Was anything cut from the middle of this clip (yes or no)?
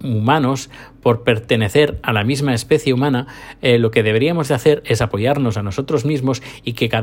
no